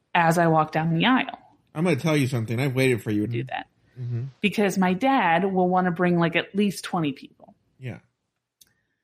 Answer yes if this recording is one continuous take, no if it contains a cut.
no